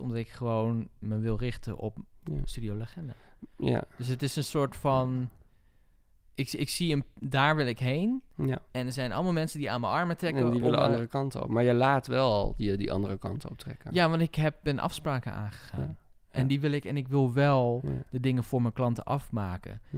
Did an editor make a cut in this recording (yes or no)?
no